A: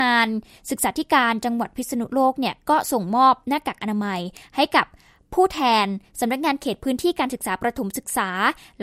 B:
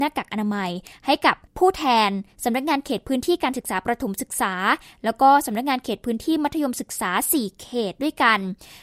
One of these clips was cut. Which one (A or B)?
B